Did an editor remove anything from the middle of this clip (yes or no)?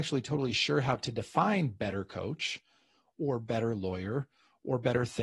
no